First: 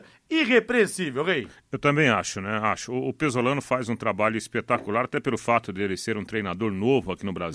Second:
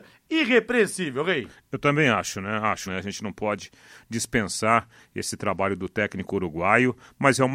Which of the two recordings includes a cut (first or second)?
second